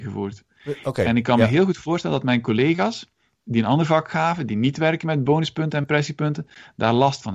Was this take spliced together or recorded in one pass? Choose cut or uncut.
uncut